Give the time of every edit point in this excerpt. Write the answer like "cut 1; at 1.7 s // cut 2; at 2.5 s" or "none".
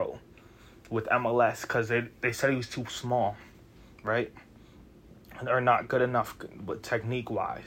none

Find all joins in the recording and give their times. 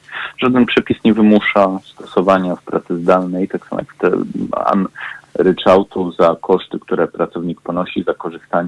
cut 1; at 5.2 s

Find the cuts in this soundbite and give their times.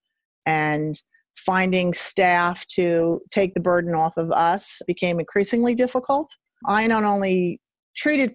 none

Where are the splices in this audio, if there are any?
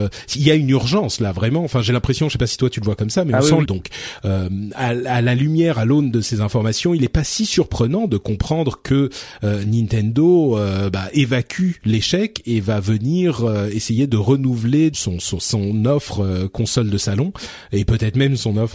cut 1; at 3.6 s // cut 2; at 14.9 s

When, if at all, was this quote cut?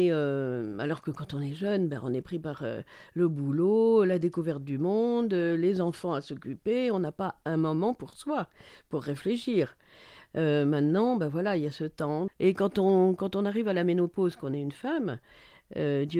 cut 1; at 12.3 s

